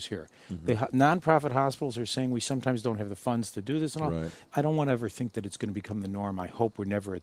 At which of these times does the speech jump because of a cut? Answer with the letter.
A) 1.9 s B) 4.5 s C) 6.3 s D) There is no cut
B